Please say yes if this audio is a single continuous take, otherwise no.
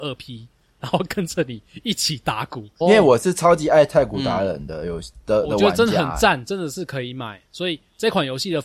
no